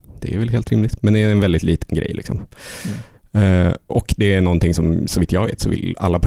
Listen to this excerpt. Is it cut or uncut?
cut